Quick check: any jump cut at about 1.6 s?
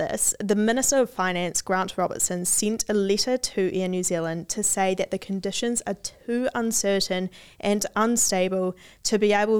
no; 0 cuts

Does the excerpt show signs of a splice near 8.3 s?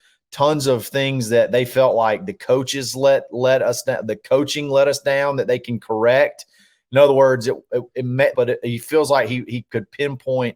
yes; 1 cut; at 8.3 s

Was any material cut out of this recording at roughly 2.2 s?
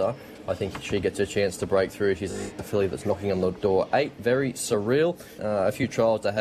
no; 1 cut; at 5.4 s

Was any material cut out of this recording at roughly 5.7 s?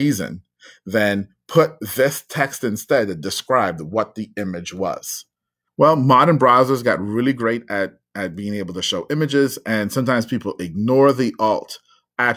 yes; 1 cut; at 5.7 s

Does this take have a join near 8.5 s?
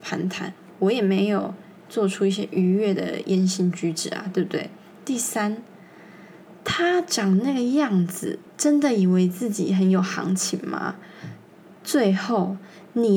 yes; 1 cut; at 8.5 s

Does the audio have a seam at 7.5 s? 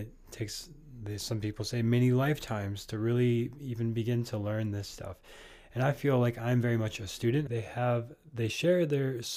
yes; 1 cut; at 7.5 s

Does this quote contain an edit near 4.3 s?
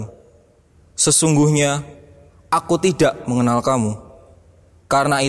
no; 0 cuts

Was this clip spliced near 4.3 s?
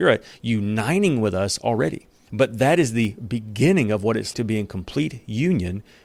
yes; 2 cuts; at 2.3 s, 4.3 s

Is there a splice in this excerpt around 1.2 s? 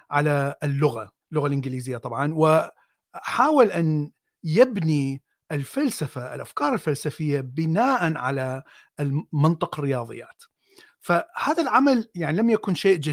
yes; 1 cut; at 1.2 s

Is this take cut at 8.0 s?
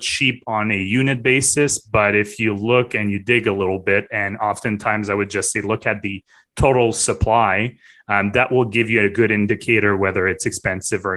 no; 0 cuts

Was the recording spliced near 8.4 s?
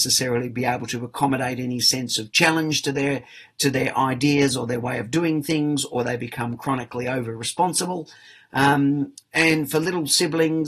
no; 0 cuts

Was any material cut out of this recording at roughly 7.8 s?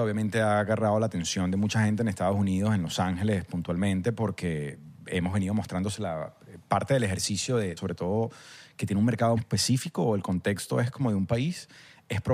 yes; 2 cuts; at 7.8 s, 9.4 s

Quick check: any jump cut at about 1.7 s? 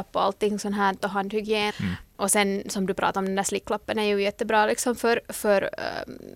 yes; 1 cut; at 1.7 s

